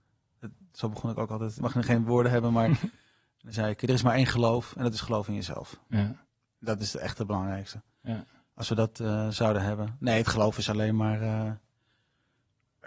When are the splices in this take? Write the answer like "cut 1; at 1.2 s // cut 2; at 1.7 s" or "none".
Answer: cut 1; at 1.6 s